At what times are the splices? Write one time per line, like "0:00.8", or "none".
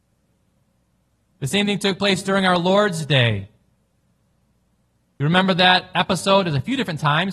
none